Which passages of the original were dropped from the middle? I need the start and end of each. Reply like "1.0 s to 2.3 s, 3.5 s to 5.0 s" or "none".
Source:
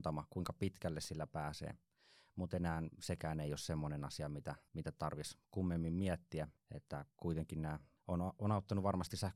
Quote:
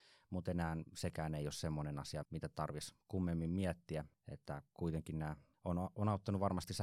4.3 s to 4.7 s